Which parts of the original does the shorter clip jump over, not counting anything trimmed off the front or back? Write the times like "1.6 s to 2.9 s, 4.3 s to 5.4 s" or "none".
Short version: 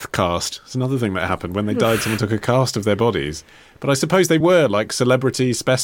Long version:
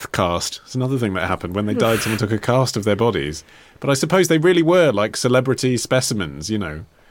4.4 s to 4.6 s